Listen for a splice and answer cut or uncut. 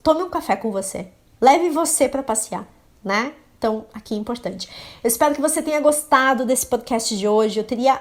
uncut